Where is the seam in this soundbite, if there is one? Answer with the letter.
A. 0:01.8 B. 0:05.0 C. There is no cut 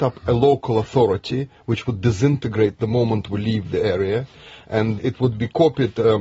B